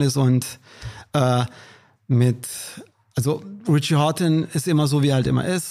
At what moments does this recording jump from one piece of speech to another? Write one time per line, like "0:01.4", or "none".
none